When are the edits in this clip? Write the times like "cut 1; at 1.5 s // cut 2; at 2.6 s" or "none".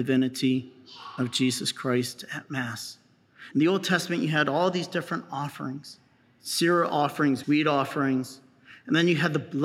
cut 1; at 3.5 s // cut 2; at 7.4 s